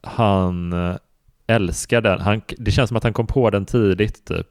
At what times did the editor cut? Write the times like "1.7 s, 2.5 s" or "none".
1.4 s